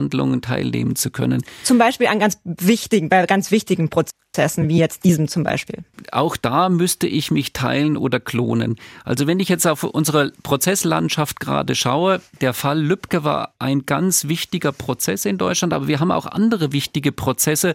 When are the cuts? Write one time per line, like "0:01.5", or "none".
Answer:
none